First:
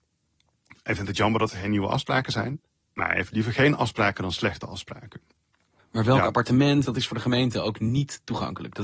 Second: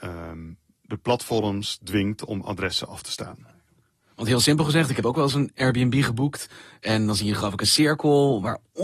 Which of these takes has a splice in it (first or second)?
first